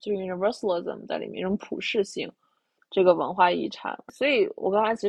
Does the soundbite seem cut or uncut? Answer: cut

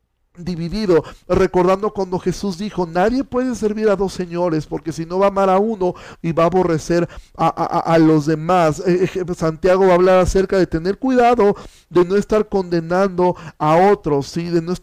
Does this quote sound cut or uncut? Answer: uncut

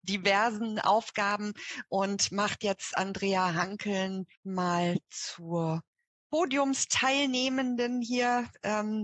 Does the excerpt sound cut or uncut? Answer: cut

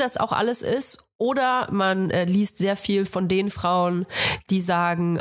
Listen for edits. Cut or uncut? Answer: uncut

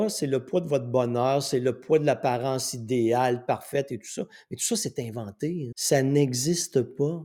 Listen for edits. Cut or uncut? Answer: cut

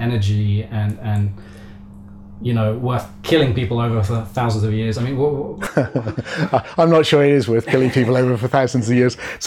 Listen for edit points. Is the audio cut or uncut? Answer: uncut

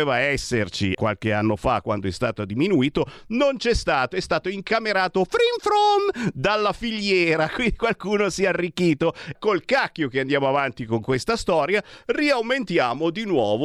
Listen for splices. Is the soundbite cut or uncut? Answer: cut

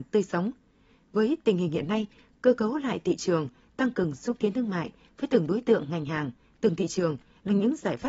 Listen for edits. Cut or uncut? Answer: uncut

